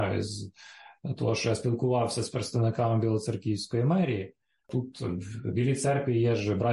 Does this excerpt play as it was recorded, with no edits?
no; 1 cut; at 4.6 s

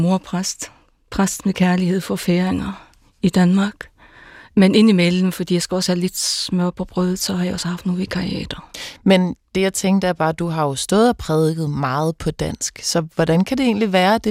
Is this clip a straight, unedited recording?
yes; 0 cuts

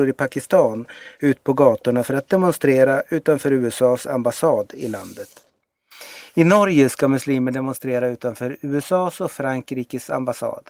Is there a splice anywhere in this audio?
no; 0 cuts

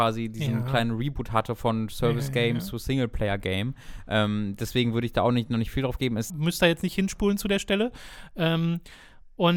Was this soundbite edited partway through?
yes; 1 cut; at 6.3 s

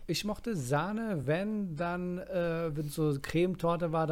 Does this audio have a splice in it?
no; 0 cuts

